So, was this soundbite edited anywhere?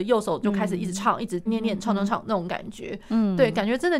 yes; 1 cut; at 1.5 s

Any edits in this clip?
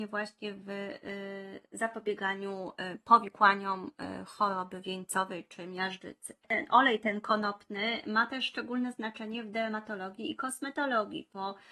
yes; 1 cut; at 6.4 s

